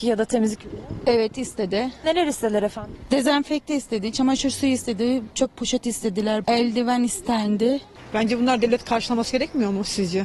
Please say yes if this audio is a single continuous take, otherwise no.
no